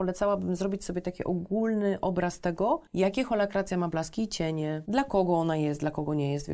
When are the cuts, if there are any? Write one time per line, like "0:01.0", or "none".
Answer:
0:04.8